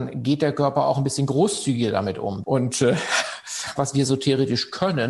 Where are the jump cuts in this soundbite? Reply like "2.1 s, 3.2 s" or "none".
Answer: 2.4 s, 3.8 s

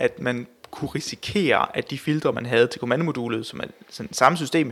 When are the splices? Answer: none

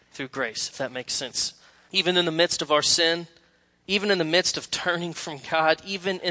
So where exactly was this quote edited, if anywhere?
1.9 s

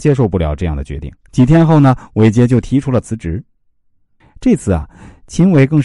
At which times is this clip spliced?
4.2 s

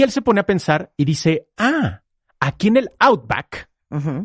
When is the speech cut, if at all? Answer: none

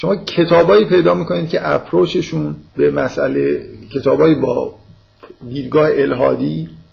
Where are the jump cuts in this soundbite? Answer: 2.7 s

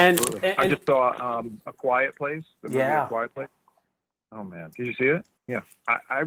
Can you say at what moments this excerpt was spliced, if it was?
5.4 s

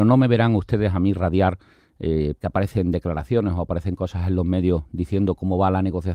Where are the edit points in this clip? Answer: 2.4 s

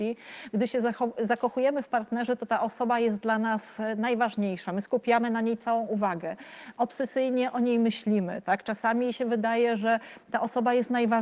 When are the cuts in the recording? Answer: none

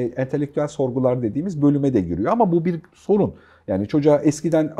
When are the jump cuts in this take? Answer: none

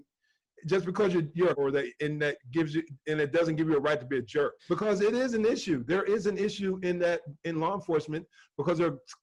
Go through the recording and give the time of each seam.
1.5 s, 4.6 s

